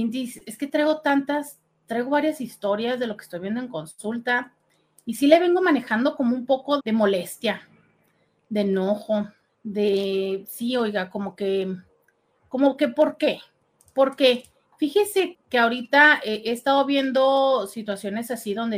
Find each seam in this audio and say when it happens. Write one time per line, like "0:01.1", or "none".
0:06.8
0:15.3